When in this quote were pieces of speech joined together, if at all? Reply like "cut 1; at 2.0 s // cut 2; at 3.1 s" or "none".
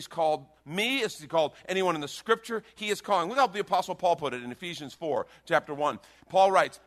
none